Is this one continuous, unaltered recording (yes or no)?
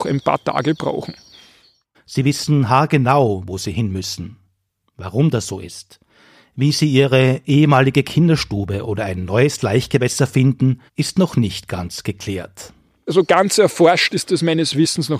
no